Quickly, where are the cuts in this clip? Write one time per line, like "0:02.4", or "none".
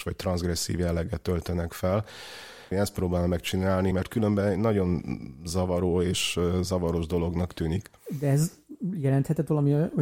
0:02.7
0:03.9